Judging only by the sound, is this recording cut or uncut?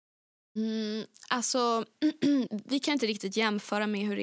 cut